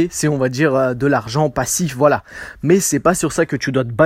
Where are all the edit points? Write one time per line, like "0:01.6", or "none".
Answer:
none

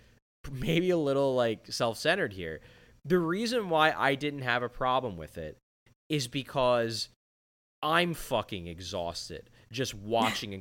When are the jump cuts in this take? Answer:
none

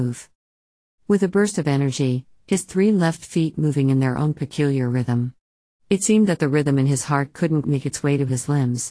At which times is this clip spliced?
0:02.4
0:05.8
0:07.6

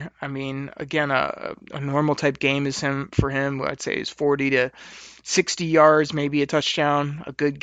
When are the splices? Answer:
none

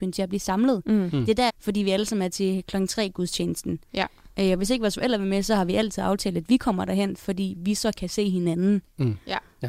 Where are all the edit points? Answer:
0:01.5

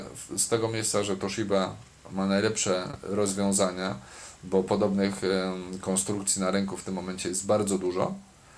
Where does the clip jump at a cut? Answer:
none

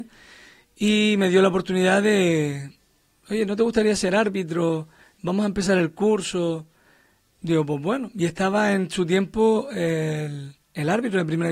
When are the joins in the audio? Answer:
none

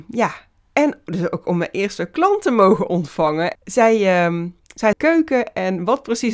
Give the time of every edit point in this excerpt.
0:03.6
0:04.9

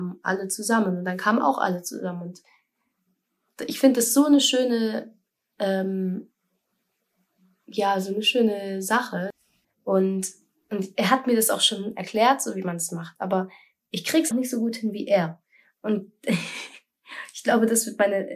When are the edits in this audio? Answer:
0:09.6
0:14.3

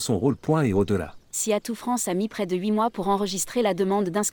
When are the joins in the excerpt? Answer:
0:01.2

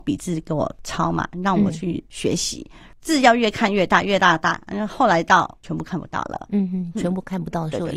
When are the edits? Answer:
none

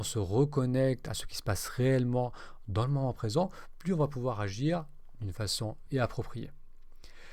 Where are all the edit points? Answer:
0:05.9

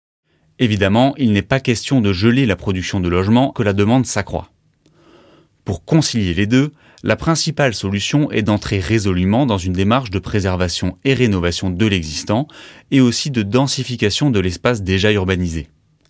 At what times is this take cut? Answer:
0:03.5

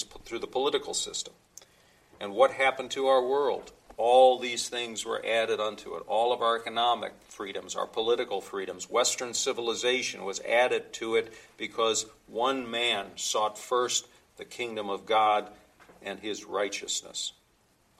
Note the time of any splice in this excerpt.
none

